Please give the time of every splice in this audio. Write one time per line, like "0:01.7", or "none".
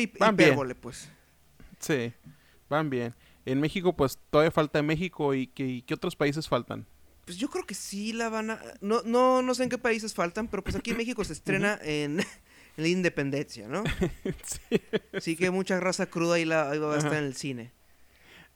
none